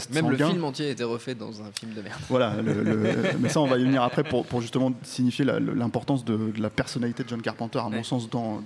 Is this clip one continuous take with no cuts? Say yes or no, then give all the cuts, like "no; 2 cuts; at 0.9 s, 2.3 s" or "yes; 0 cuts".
yes; 0 cuts